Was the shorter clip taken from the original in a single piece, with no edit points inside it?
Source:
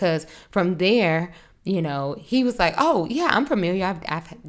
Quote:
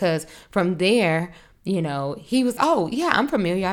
no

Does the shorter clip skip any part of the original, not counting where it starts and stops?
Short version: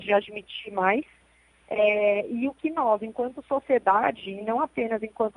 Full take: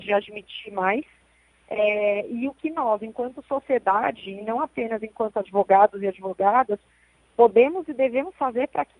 no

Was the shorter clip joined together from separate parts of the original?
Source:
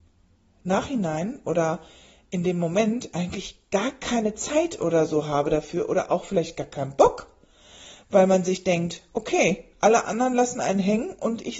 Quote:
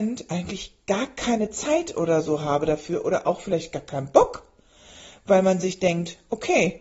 no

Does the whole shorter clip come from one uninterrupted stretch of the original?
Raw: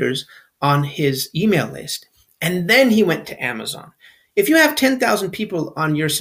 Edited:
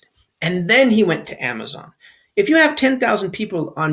yes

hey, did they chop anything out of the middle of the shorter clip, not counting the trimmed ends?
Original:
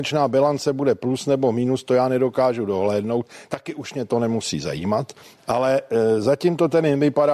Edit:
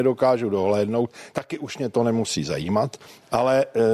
no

